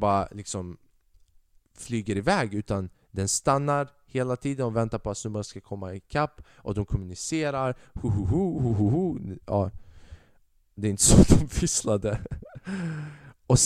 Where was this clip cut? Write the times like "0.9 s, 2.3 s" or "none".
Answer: none